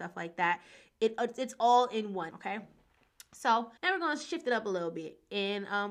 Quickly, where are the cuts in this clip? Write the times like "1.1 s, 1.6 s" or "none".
2.3 s, 3.8 s